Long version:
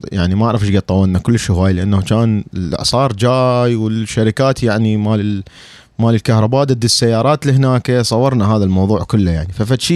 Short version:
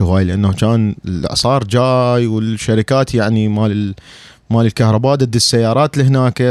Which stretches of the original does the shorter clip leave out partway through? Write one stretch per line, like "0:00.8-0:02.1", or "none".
none